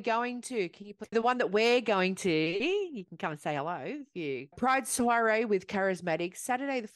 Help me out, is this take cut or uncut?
cut